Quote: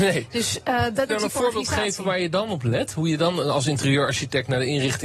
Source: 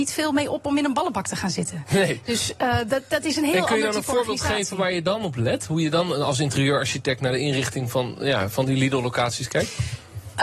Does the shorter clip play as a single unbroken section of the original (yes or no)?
no